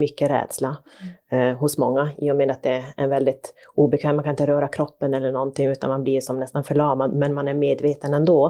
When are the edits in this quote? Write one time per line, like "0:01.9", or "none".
none